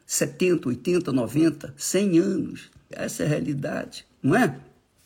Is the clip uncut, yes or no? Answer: no